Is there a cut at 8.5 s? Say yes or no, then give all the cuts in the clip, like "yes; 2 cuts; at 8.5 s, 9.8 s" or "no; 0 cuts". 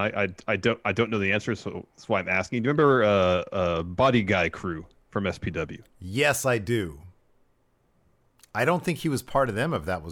no; 0 cuts